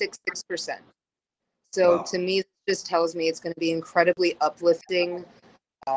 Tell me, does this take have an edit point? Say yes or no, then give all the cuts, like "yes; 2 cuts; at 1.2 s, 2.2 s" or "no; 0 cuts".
no; 0 cuts